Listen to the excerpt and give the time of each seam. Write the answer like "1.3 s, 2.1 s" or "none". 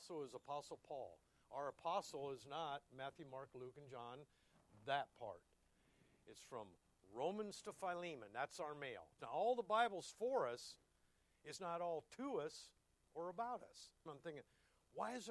9.2 s, 11.6 s, 14.1 s